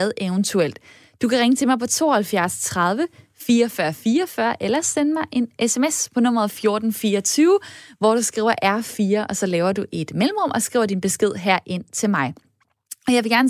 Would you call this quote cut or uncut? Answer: uncut